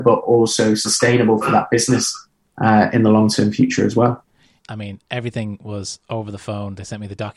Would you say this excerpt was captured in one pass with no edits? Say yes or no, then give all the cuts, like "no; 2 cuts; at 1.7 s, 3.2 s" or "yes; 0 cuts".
no; 1 cut; at 4.6 s